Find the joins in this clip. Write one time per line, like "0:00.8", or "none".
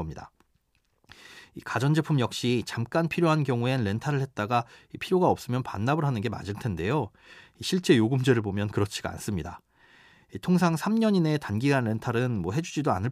none